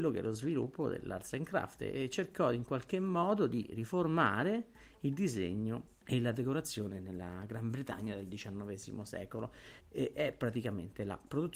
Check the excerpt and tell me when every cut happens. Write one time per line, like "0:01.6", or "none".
0:06.0
0:09.8